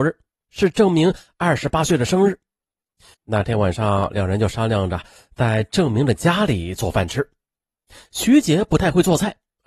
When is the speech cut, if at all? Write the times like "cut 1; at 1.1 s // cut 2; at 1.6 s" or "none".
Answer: cut 1; at 3.1 s

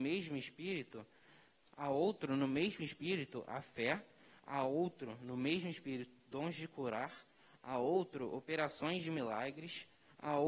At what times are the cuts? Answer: cut 1; at 1.7 s

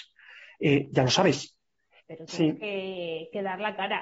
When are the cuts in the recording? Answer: cut 1; at 2.0 s

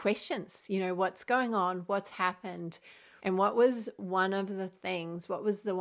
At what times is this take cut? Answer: cut 1; at 3.2 s

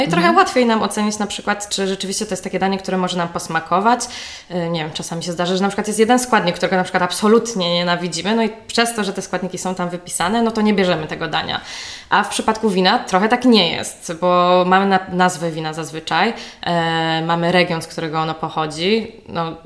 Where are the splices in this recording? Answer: none

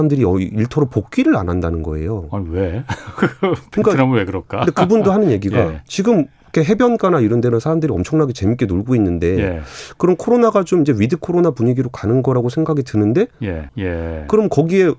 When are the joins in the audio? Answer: cut 1; at 13.7 s

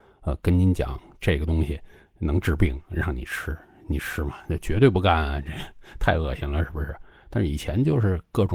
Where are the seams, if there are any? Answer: none

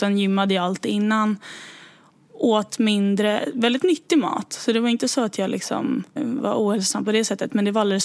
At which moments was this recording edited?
cut 1; at 6.2 s

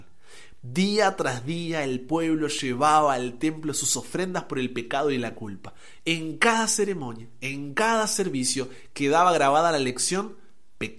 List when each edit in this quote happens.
none

